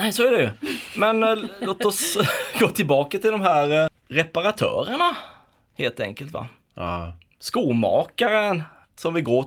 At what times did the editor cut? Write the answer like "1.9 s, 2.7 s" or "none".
3.9 s

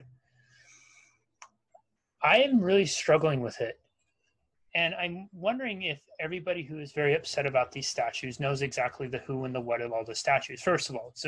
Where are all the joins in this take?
4.7 s

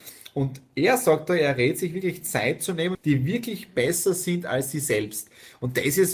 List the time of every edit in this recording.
2.9 s

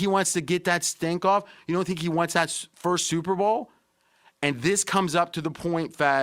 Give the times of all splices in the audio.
none

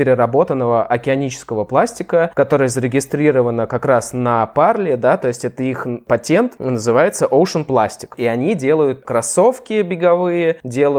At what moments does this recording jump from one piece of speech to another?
none

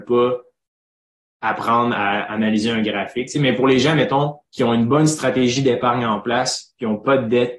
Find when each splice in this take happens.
4.4 s

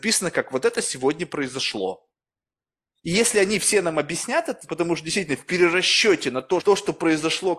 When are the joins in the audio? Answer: 4.7 s, 6.6 s

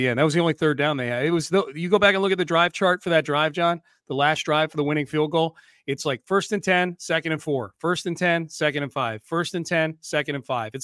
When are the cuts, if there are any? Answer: none

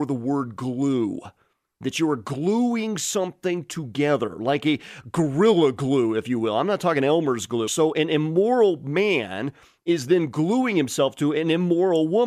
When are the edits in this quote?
7.7 s

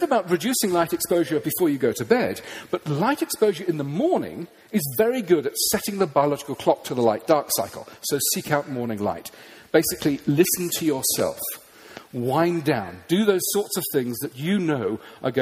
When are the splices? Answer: none

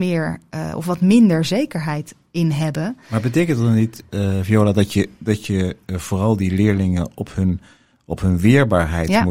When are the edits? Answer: none

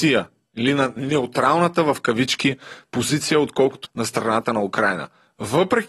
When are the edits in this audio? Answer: 3.8 s

